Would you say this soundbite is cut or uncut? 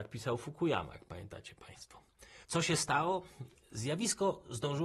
cut